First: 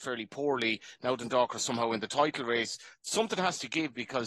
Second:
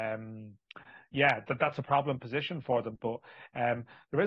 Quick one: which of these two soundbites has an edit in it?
second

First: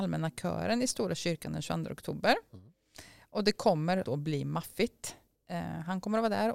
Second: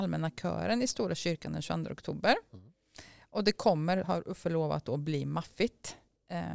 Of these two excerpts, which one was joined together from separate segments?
first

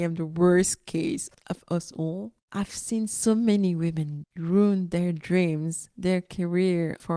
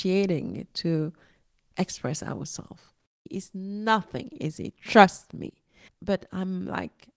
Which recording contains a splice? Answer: second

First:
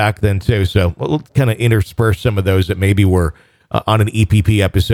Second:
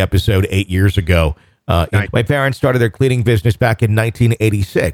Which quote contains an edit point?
second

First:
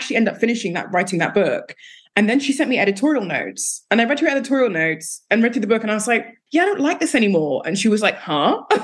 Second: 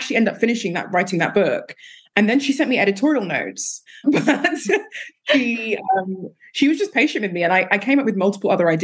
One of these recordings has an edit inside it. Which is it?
second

